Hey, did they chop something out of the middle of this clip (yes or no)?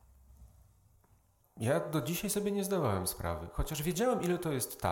yes